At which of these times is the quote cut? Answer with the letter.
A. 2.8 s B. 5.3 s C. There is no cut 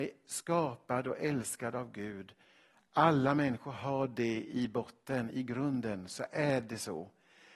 C